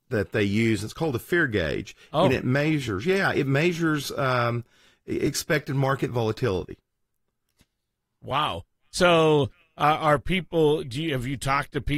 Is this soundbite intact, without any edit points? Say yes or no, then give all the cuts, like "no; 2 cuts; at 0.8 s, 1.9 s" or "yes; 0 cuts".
yes; 0 cuts